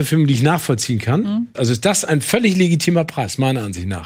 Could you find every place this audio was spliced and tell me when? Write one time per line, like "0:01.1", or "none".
0:01.5

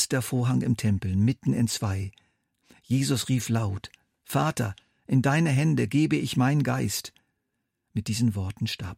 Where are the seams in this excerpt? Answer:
none

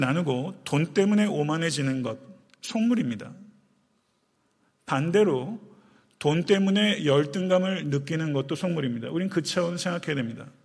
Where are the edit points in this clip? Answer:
none

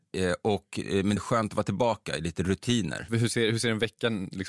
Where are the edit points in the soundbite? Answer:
0:01.2
0:03.1

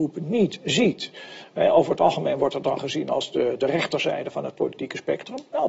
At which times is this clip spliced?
none

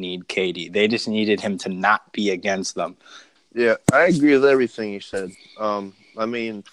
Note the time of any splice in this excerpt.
0:03.4

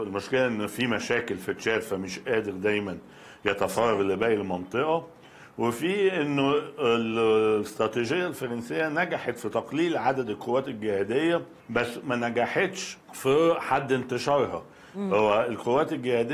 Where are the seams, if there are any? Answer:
0:11.6
0:13.0

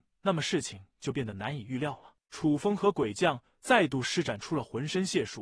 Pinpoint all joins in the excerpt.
none

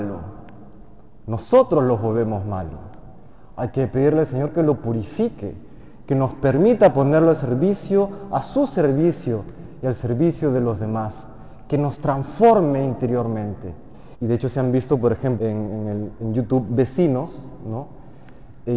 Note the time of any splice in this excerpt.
0:14.1
0:15.4

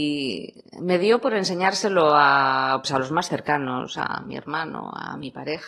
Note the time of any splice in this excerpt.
0:02.8
0:04.0

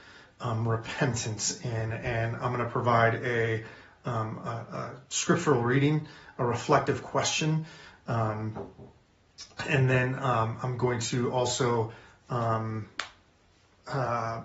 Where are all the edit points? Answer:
none

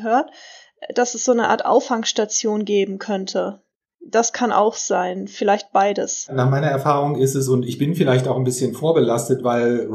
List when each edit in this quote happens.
none

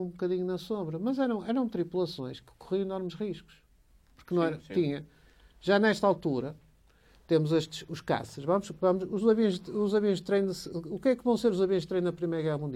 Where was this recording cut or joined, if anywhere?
none

